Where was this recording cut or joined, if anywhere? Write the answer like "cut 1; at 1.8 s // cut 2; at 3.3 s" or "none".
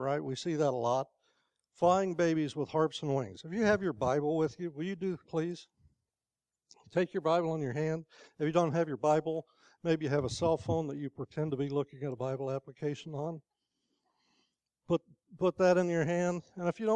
cut 1; at 5.2 s